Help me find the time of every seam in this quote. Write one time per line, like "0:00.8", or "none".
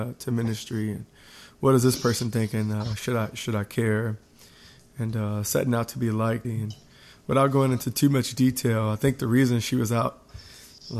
0:06.4